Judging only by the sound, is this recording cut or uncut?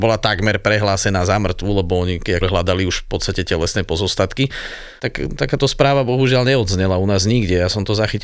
cut